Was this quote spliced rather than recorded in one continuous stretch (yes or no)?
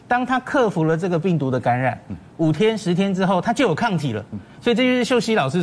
no